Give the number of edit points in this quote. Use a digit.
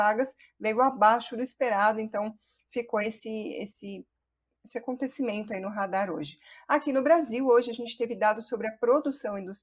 0